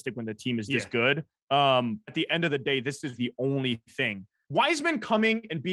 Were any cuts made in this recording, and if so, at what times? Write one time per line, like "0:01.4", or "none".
0:02.0
0:03.2
0:04.4